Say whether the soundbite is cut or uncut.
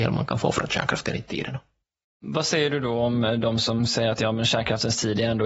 uncut